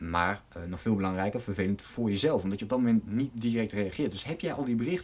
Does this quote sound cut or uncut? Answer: uncut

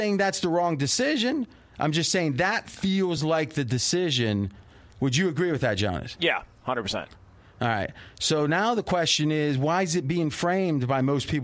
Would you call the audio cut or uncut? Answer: uncut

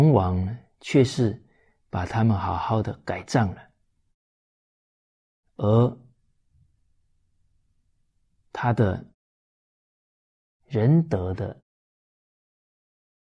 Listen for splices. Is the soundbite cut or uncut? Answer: uncut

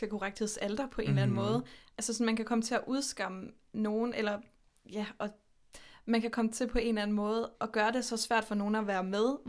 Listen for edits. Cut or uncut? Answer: cut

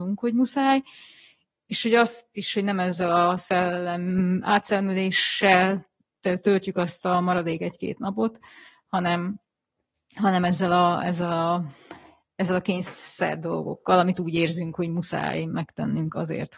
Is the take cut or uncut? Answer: uncut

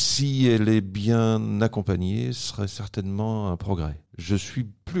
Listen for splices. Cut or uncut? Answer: uncut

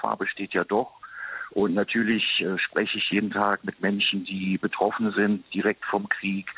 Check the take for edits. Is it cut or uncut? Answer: uncut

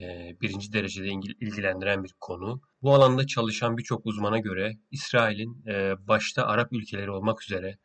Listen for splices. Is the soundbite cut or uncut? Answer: uncut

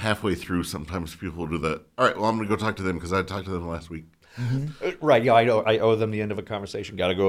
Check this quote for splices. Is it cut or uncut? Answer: uncut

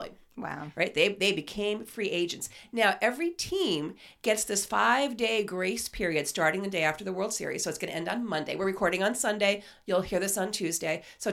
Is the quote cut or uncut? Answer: uncut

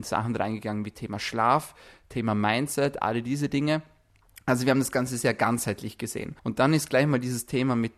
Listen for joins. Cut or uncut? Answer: cut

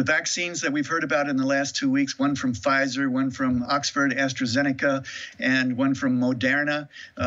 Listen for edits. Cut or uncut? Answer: cut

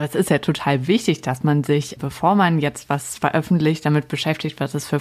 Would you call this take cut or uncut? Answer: uncut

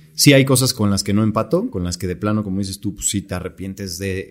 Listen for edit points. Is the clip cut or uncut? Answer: uncut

